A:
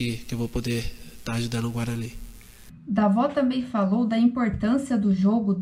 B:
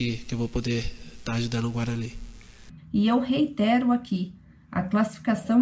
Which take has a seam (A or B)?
B